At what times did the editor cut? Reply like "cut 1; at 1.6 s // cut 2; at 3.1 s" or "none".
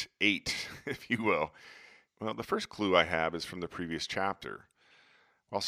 cut 1; at 2.1 s